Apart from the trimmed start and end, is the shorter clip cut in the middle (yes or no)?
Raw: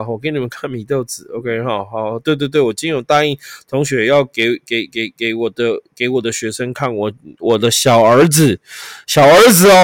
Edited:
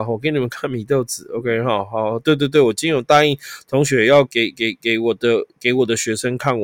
yes